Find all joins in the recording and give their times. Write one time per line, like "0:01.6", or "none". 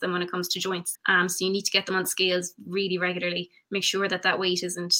0:00.9